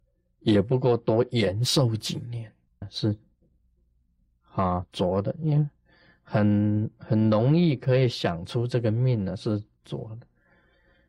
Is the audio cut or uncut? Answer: cut